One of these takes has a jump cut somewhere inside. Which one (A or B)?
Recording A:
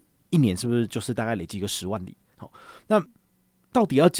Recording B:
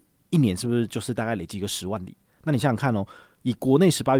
A